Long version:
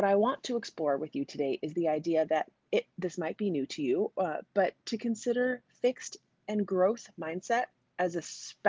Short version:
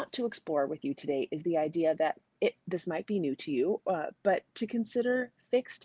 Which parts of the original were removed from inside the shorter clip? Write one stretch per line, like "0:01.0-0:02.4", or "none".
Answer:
none